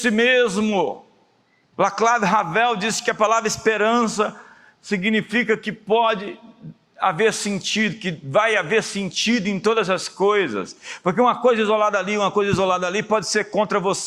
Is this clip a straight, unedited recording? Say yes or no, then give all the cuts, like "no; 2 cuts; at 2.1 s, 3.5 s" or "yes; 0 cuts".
no; 1 cut; at 1.6 s